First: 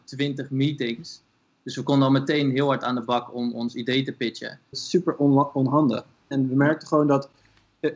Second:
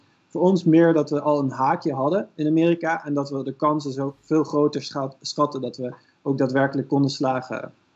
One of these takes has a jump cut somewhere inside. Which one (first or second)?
first